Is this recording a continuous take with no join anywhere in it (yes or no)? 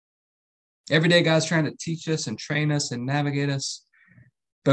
yes